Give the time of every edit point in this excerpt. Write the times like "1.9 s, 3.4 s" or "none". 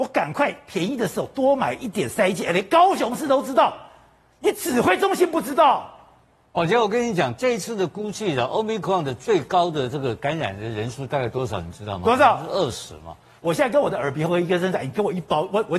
13.4 s